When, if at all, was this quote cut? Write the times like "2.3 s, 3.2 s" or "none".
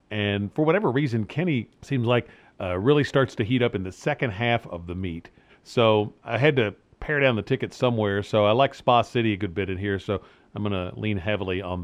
1.7 s, 5.5 s